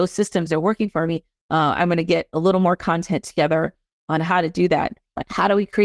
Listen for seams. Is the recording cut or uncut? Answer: cut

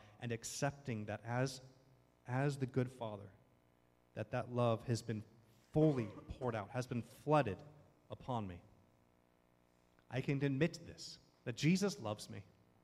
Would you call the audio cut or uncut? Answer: uncut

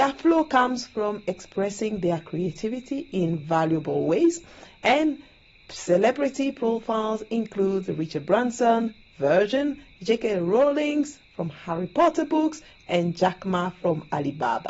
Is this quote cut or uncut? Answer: uncut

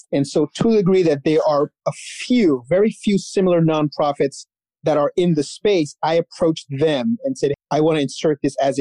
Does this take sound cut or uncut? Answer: cut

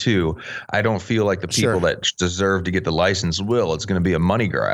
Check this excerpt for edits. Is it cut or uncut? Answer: uncut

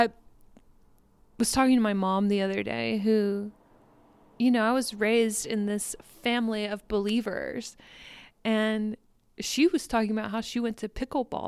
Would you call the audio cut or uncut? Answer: uncut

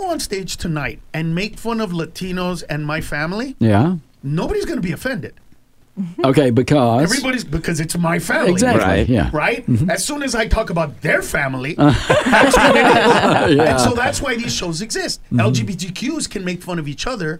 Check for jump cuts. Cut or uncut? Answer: uncut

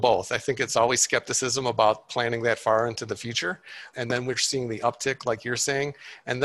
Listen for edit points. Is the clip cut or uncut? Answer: cut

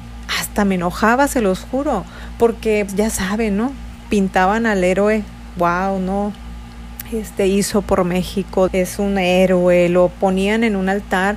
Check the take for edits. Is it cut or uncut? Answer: cut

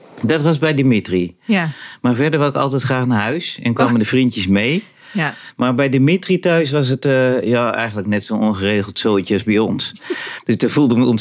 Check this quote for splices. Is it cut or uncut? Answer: uncut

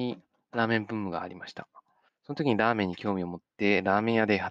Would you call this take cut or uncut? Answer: cut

